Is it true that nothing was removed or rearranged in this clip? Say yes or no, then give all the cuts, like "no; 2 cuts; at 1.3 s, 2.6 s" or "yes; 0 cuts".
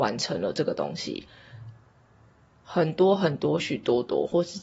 no; 1 cut; at 3.6 s